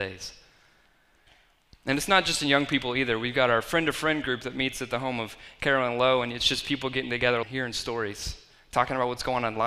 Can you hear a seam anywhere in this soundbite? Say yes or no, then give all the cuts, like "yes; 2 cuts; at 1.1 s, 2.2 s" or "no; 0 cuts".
yes; 1 cut; at 7.4 s